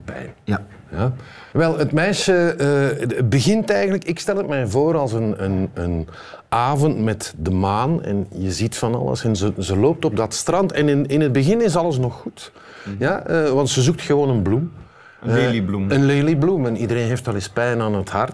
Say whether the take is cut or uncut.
cut